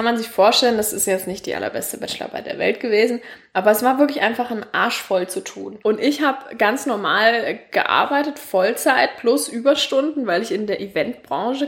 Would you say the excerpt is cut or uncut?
cut